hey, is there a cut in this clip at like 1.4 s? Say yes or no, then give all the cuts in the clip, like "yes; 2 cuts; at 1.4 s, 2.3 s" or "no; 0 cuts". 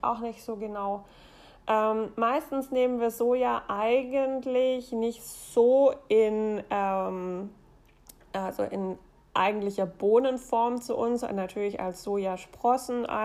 no; 0 cuts